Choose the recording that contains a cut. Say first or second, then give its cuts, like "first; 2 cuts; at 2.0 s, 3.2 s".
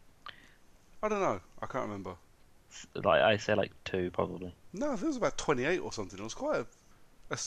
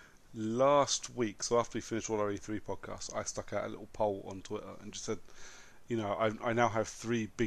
first; 1 cut; at 0.9 s